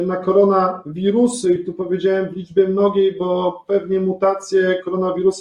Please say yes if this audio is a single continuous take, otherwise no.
yes